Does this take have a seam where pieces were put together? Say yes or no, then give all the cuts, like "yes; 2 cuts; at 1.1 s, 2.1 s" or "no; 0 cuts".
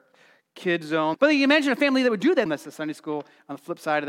yes; 2 cuts; at 1.1 s, 2.5 s